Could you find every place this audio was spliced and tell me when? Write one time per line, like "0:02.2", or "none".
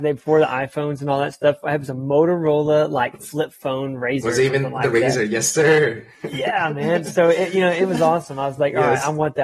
none